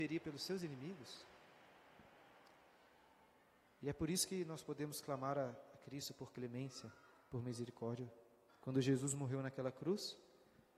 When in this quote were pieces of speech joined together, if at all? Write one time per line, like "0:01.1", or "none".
0:08.5